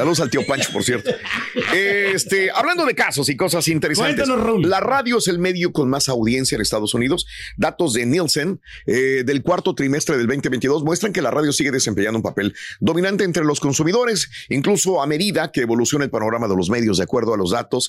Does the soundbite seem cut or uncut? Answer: uncut